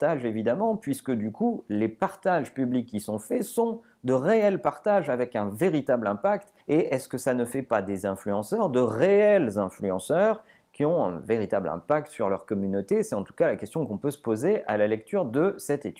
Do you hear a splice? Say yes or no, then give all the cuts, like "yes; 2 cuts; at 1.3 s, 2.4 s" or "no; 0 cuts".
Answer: yes; 1 cut; at 6.6 s